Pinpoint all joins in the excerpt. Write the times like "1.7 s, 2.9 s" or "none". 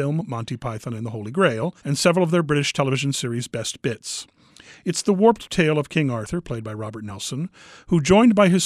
1.8 s

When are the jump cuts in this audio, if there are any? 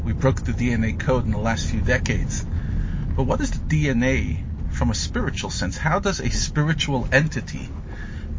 none

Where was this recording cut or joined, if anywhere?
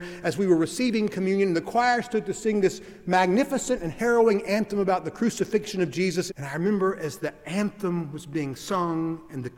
6.3 s

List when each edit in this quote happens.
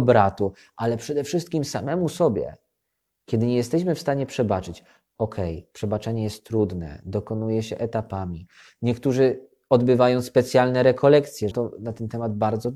11.5 s

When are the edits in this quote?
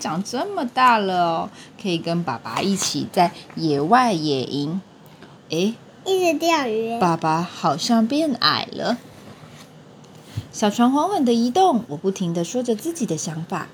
5.4 s

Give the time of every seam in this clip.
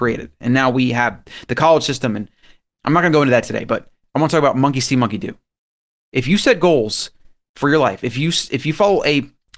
none

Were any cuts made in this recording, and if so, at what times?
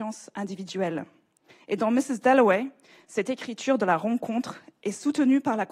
none

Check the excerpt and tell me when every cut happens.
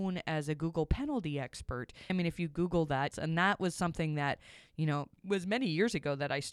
2.1 s, 3.1 s, 5.2 s

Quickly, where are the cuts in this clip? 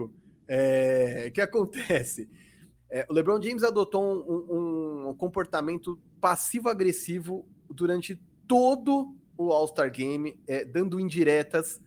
2.8 s

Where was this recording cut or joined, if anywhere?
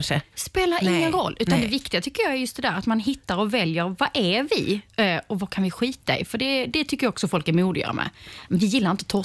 none

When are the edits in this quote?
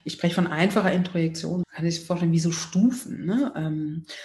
1.6 s

